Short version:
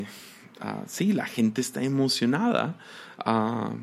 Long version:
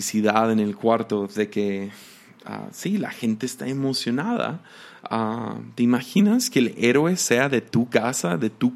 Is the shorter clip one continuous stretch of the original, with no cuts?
yes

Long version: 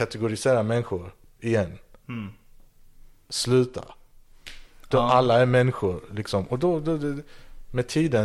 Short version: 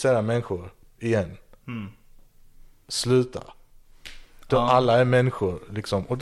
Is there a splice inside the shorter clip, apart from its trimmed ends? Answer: no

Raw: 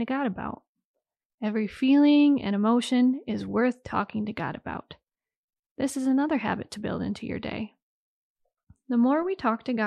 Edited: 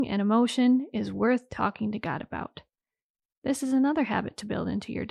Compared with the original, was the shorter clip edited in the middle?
no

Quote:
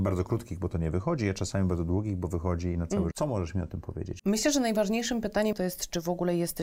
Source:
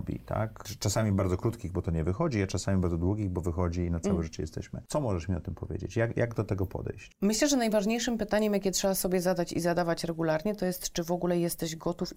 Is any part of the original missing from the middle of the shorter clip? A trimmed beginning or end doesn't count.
yes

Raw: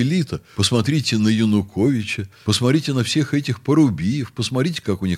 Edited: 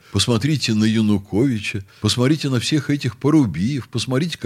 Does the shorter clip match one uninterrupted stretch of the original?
yes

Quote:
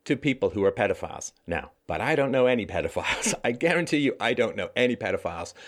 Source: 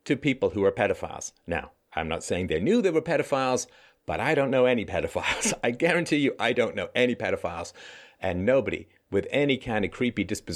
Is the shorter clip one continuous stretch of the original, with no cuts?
no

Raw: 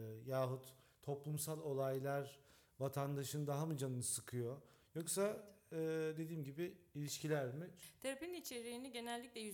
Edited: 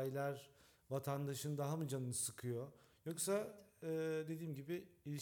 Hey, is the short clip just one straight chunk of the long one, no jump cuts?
yes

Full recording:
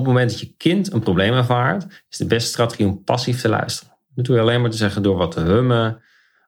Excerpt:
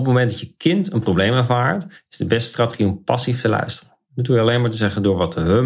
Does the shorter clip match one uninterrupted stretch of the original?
yes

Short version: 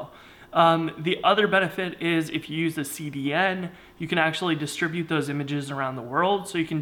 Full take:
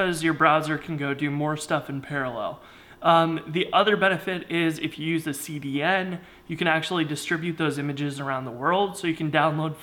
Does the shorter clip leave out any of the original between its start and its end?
no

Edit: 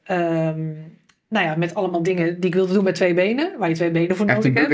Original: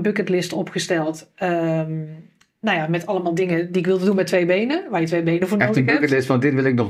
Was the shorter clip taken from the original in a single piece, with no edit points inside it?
yes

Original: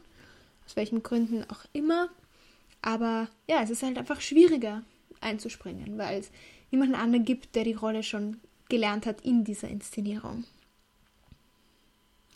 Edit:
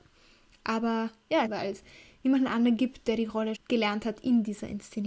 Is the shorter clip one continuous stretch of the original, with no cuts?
no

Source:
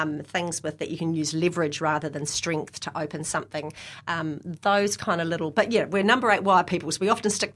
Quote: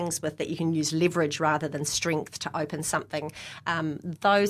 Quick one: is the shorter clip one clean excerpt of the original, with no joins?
yes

